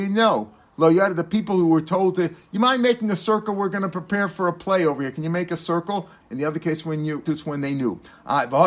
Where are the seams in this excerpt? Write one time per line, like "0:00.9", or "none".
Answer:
0:06.2
0:07.3